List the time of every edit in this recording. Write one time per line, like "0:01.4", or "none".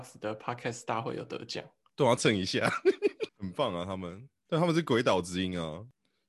0:02.2
0:03.3